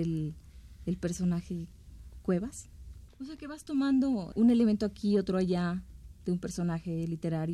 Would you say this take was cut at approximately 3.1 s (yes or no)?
yes